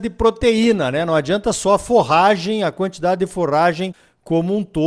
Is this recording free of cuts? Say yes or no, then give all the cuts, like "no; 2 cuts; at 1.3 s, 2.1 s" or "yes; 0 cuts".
yes; 0 cuts